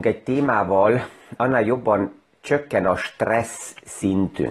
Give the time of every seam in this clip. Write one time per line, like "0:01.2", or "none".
0:01.4